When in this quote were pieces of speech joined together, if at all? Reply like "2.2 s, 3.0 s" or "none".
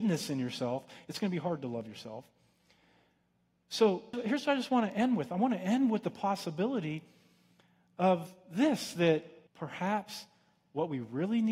4.1 s, 9.5 s